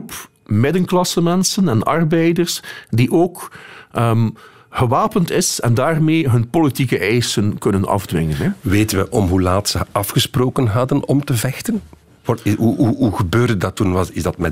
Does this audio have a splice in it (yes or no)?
no